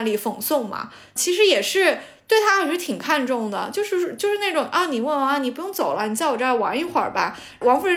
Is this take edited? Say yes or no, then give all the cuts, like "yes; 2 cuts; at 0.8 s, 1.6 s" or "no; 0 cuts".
no; 0 cuts